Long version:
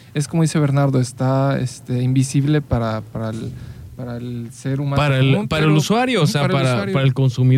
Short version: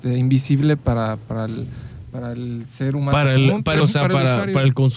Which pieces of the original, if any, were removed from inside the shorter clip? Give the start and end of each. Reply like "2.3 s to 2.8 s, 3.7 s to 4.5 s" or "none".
5.6 s to 6.2 s

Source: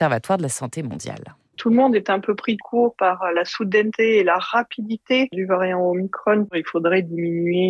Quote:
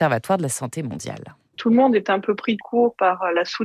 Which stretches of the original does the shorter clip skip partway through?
none

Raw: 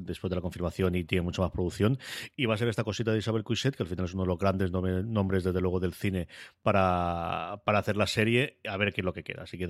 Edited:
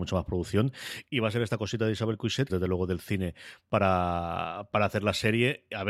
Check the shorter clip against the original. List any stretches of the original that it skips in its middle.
3.8 s to 5.4 s

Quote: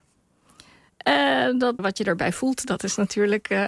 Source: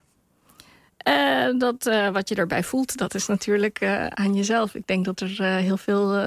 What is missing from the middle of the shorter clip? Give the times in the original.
1.8 s to 2.1 s

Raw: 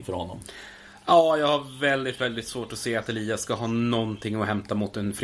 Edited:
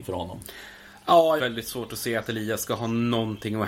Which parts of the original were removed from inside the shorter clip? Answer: 1.4 s to 2.2 s

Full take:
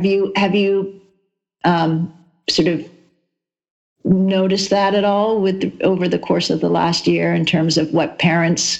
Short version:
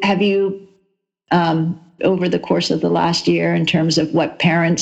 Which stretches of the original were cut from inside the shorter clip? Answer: 2.3 s to 5.8 s

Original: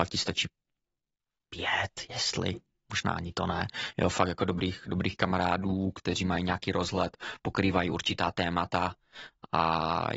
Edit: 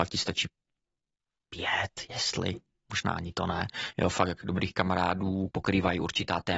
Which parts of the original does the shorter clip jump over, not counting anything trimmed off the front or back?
4.4 s to 4.8 s, 5.9 s to 7.4 s

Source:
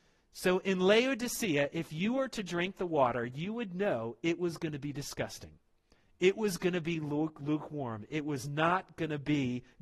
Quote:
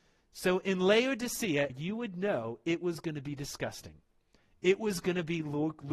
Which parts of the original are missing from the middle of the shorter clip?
1.7 s to 3.3 s

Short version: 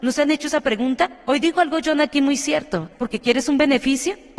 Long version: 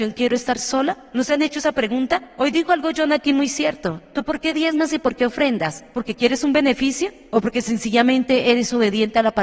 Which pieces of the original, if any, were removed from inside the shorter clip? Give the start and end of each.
4.0 s to 5.9 s

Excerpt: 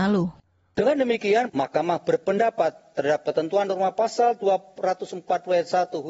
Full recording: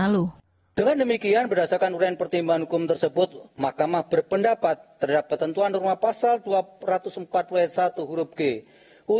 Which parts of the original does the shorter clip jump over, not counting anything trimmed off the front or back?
1.5 s to 3.5 s

